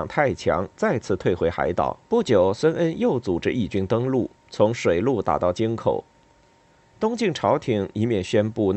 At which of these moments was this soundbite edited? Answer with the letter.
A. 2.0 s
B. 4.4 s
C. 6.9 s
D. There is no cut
A